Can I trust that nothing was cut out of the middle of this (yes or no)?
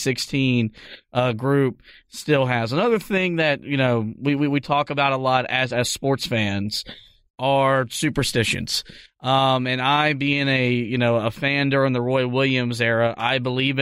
yes